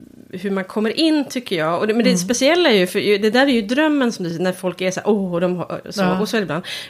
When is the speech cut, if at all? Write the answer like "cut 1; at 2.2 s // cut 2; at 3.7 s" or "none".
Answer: none